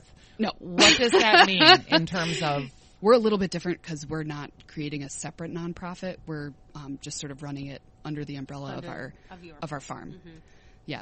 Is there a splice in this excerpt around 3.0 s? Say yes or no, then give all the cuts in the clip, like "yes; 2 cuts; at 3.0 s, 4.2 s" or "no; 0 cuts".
yes; 1 cut; at 3.0 s